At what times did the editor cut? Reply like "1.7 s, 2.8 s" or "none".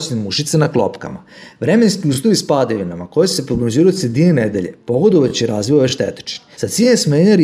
6.5 s

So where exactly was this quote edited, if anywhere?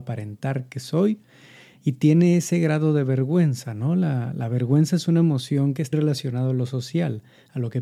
5.9 s

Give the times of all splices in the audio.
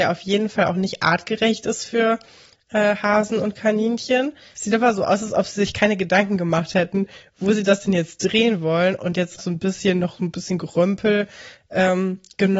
4.5 s, 9.4 s

